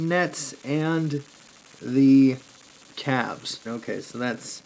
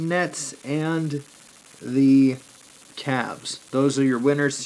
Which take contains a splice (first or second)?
first